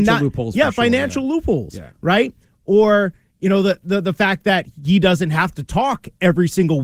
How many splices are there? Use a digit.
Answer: 0